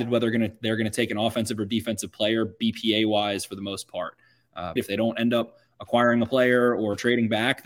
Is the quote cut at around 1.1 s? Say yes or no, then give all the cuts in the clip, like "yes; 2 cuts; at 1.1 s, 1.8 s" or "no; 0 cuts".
no; 1 cut; at 4.8 s